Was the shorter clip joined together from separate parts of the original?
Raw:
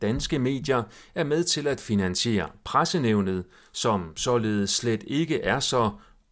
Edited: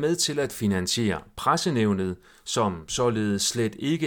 no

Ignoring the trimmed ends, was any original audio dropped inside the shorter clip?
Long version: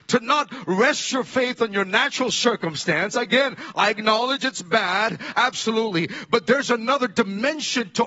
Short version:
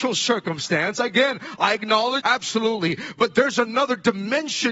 yes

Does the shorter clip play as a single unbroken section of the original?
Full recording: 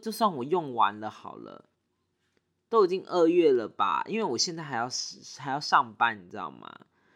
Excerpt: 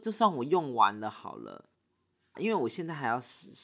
no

